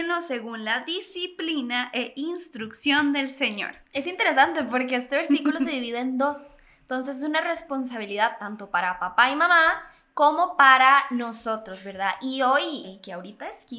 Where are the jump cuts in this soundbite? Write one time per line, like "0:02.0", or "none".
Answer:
0:03.8
0:12.8